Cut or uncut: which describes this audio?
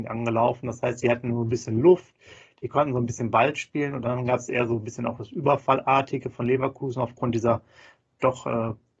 uncut